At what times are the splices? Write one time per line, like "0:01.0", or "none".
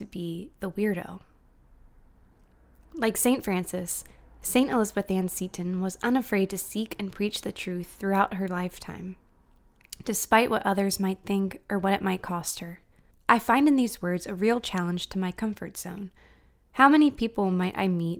0:13.1
0:16.7